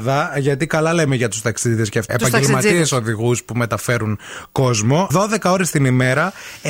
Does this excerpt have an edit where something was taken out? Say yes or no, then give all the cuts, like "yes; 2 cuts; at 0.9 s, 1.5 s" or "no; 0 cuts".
yes; 2 cuts; at 2.1 s, 5.1 s